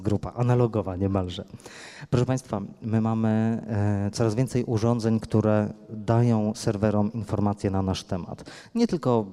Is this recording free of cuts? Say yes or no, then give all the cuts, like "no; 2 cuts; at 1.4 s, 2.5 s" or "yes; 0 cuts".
yes; 0 cuts